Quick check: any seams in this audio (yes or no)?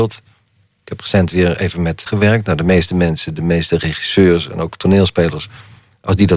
yes